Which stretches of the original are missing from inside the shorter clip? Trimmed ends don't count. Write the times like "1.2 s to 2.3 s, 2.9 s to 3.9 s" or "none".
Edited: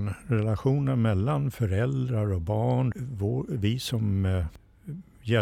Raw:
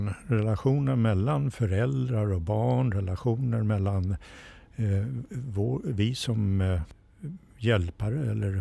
2.9 s to 5.3 s